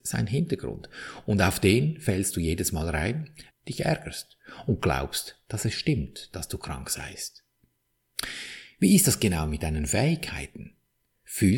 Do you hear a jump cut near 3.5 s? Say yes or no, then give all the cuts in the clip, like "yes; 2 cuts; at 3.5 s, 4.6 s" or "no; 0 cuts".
yes; 1 cut; at 3.5 s